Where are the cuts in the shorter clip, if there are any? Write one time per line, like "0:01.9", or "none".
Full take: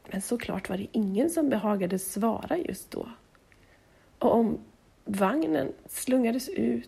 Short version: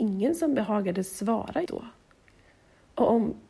0:01.7